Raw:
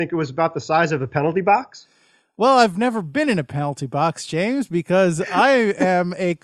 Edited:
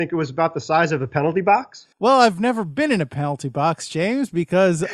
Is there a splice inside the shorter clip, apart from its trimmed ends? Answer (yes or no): yes